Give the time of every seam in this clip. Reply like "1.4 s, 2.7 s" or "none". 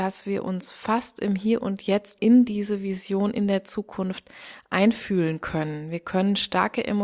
2.2 s